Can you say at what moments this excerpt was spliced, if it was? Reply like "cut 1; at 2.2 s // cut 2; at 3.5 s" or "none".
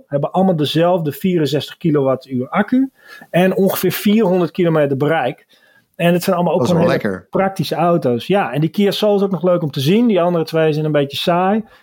none